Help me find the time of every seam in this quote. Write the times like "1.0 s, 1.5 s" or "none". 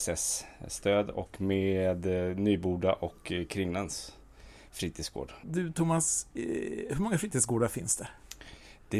5.4 s